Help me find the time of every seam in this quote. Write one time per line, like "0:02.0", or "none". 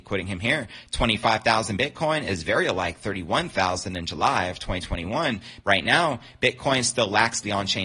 0:05.6